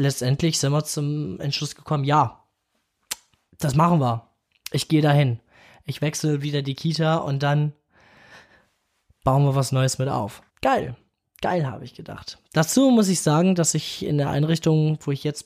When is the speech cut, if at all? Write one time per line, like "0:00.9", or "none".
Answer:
0:10.5